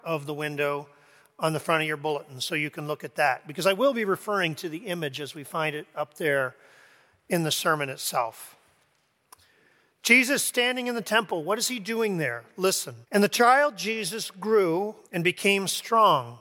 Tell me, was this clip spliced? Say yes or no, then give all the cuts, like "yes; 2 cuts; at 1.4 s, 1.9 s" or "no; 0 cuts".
yes; 2 cuts; at 13.0 s, 15.0 s